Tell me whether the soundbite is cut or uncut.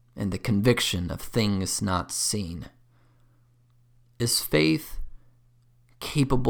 uncut